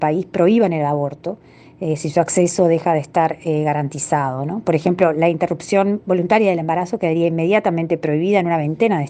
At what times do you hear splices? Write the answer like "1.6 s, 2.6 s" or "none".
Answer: none